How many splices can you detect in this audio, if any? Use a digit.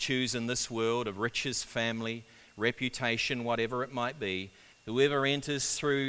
2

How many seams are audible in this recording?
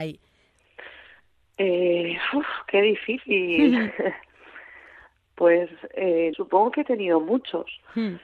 1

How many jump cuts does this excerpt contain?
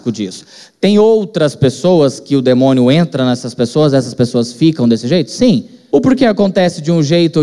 1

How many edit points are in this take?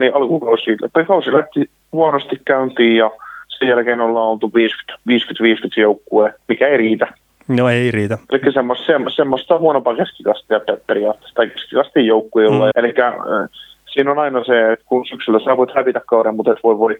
1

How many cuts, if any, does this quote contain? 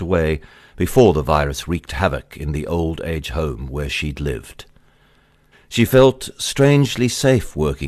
1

